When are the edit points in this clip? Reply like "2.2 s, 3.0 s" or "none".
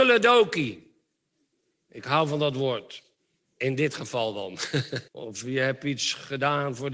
5.1 s